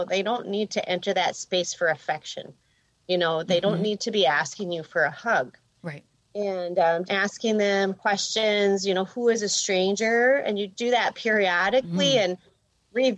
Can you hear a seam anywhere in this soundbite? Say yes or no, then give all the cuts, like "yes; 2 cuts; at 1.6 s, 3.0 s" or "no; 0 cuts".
yes; 2 cuts; at 7.0 s, 10.8 s